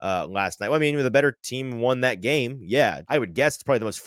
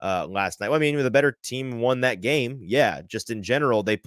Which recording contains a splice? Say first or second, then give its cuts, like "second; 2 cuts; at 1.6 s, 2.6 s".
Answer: first; 1 cut; at 3.0 s